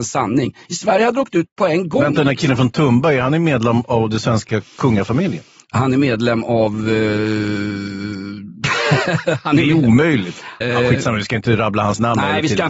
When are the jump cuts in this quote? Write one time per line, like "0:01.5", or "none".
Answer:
0:10.6